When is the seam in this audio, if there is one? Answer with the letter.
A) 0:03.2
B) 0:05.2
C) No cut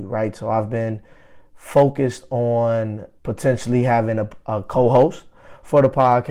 A